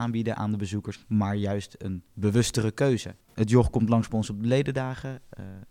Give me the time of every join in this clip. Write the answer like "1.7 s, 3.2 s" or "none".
0.9 s